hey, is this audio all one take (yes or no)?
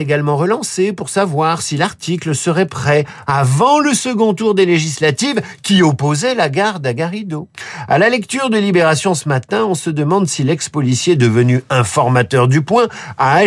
yes